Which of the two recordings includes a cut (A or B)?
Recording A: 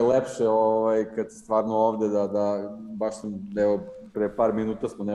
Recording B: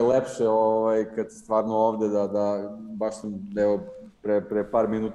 A